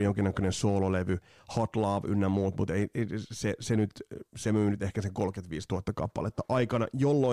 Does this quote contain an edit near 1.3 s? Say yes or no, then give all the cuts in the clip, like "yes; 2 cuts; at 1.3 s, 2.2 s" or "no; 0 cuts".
no; 0 cuts